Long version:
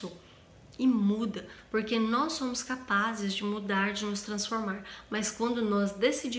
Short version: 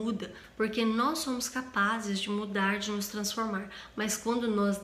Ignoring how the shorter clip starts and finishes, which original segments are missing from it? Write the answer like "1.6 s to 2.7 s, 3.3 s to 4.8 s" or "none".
none